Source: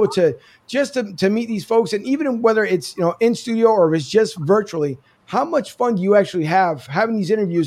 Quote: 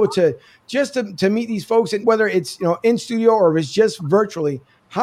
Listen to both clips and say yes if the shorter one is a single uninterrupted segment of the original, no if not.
no